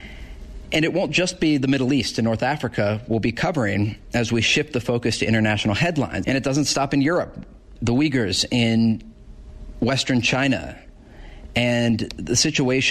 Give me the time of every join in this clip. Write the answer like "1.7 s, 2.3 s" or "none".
6.2 s, 7.8 s